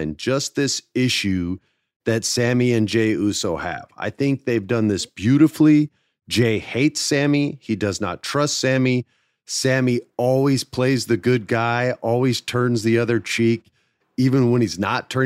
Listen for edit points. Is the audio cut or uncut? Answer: uncut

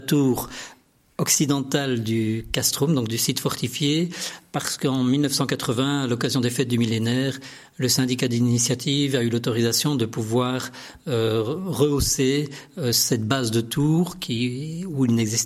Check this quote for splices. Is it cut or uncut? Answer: uncut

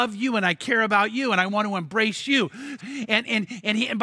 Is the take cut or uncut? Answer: cut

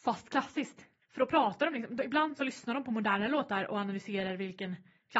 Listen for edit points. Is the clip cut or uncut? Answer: cut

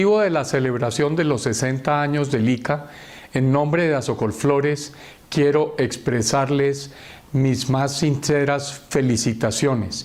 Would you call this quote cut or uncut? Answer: uncut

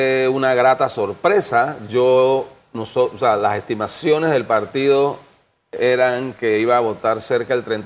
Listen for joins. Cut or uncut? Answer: uncut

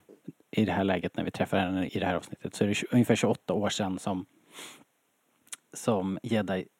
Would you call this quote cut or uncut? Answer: cut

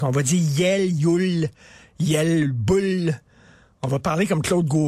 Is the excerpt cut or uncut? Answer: uncut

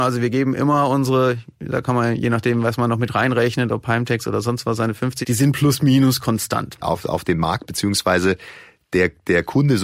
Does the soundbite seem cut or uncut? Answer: cut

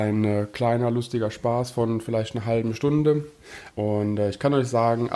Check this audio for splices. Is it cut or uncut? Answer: cut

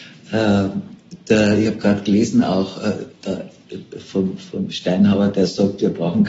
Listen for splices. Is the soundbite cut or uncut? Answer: uncut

